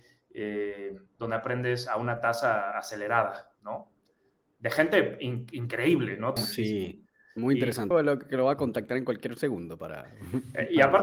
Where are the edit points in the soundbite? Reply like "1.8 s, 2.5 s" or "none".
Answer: 6.4 s, 7.9 s